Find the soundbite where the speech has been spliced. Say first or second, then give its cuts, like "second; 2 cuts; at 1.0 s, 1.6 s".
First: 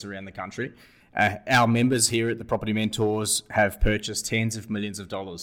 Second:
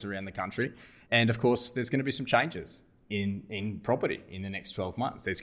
second; 1 cut; at 1.0 s